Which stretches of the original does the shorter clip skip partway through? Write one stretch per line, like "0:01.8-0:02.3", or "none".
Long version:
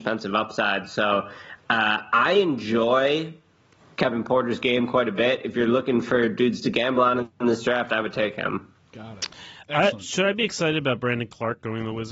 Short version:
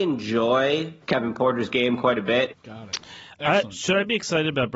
0:03.4-0:03.9
0:05.4-0:08.8